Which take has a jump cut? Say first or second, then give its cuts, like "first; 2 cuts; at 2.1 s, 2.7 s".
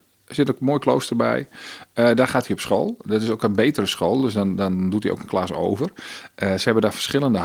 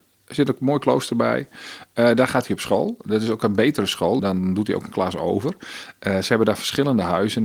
second; 1 cut; at 4.2 s